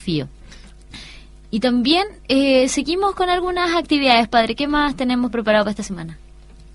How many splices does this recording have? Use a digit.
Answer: 0